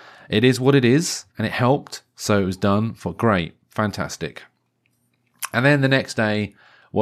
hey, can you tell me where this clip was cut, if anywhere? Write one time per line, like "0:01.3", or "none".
0:01.3

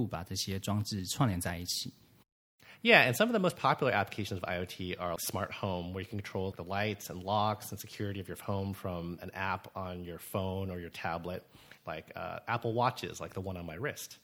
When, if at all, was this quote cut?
0:05.2
0:06.5
0:11.8

